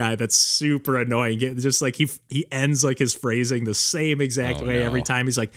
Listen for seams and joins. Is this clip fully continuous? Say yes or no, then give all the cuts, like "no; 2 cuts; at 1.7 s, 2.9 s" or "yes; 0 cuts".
yes; 0 cuts